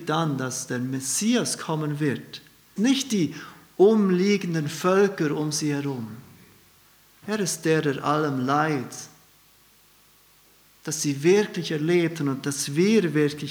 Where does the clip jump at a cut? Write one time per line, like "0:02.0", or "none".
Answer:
0:02.8
0:07.2